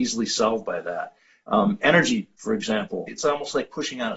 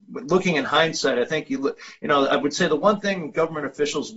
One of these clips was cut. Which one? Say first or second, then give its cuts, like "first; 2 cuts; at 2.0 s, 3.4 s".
first; 1 cut; at 3.1 s